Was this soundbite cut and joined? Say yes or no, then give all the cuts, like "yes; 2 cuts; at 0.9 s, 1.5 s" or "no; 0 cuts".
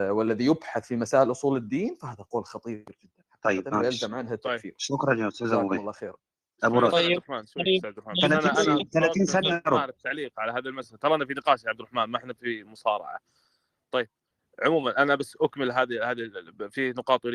no; 0 cuts